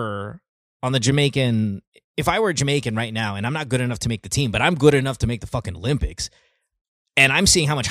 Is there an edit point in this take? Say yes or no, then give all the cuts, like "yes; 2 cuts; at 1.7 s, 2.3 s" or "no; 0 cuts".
no; 0 cuts